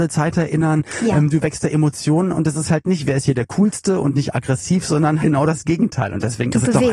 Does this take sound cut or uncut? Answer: cut